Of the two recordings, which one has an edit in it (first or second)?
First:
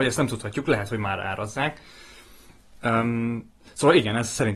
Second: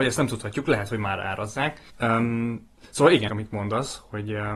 second